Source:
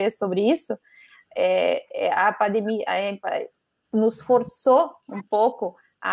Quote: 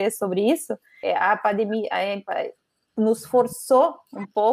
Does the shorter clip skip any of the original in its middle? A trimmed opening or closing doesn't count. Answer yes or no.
yes